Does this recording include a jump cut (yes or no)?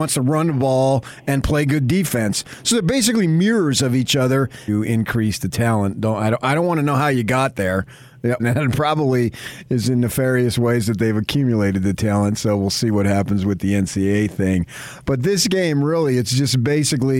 yes